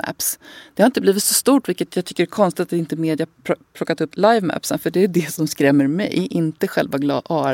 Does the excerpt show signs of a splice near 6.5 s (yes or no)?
no